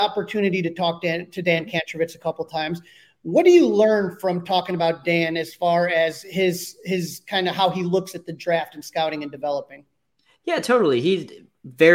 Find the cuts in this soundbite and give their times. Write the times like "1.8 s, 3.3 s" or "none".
none